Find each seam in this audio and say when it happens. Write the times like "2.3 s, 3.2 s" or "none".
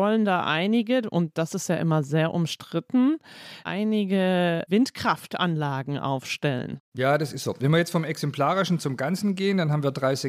none

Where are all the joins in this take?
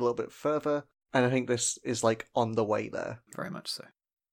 3.3 s

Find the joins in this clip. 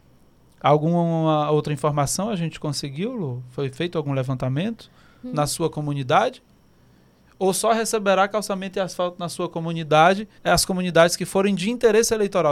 5.2 s, 10.4 s

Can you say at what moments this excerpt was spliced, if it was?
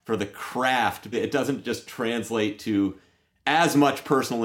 1.1 s

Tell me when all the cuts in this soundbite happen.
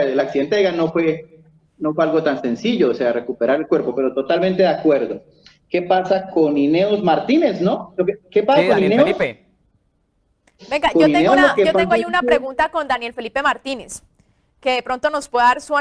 none

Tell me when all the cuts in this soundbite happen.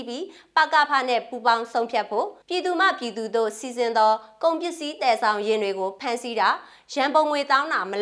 2.4 s

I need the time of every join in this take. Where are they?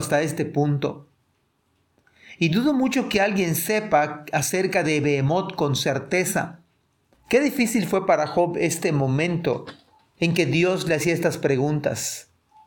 7.1 s

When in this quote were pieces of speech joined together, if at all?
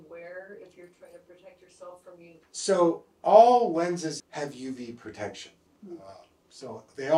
2.4 s, 4.2 s, 5.7 s

